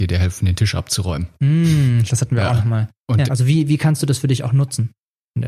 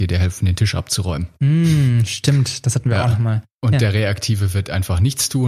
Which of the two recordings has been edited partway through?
first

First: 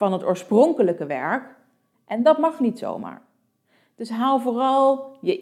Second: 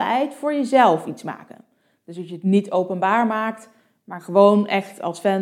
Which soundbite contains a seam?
first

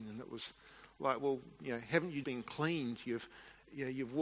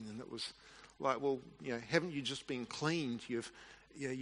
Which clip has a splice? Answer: first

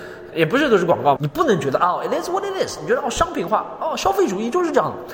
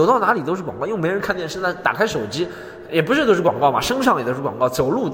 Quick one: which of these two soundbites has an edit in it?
first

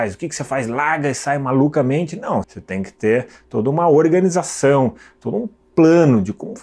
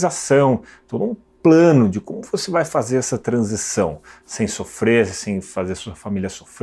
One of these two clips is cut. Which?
first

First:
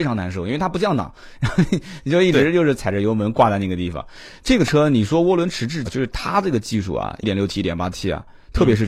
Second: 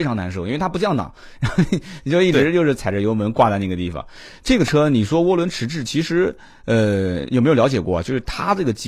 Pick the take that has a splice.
first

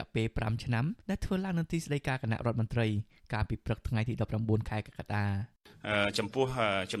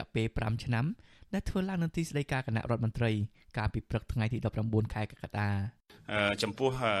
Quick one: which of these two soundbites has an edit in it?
first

